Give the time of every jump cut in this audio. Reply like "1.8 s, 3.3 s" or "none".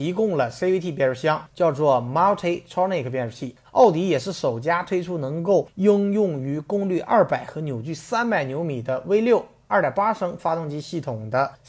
3.6 s